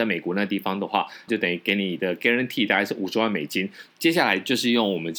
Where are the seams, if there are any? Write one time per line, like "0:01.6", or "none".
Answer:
0:01.3
0:03.9